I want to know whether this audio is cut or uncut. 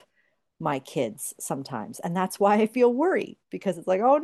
uncut